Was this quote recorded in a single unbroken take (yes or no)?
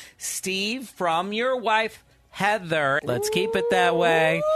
no